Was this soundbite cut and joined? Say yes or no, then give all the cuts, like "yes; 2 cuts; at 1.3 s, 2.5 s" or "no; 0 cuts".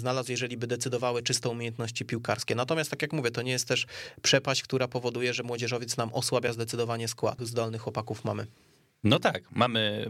yes; 1 cut; at 7.4 s